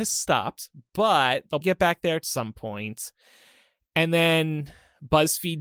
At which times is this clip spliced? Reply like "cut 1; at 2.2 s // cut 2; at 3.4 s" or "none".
cut 1; at 1.6 s